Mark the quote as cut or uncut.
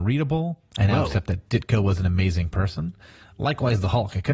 uncut